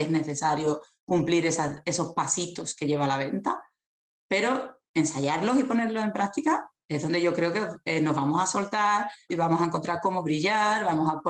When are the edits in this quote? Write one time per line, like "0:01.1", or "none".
0:09.3